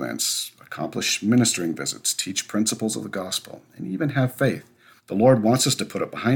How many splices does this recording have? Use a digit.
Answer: 1